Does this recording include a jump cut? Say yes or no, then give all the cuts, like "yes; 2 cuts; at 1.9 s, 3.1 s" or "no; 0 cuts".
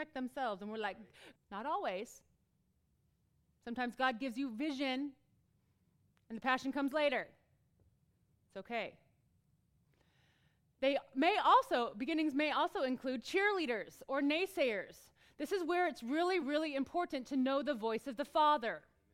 yes; 2 cuts; at 1.4 s, 16.4 s